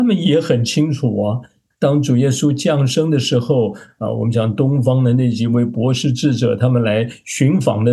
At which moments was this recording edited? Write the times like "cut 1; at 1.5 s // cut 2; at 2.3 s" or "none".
cut 1; at 1.7 s